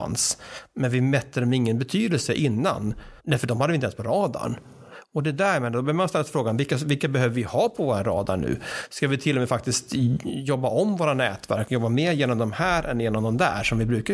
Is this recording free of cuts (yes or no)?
no